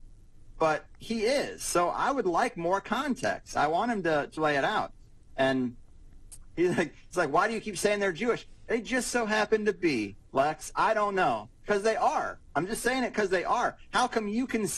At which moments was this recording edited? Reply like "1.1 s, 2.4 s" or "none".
4.4 s, 6.5 s